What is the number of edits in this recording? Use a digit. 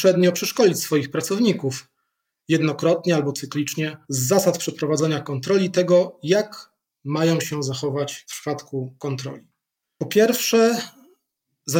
1